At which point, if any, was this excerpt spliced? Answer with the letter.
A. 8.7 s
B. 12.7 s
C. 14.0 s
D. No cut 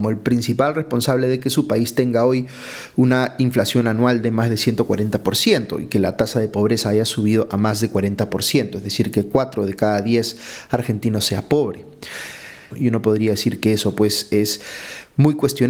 B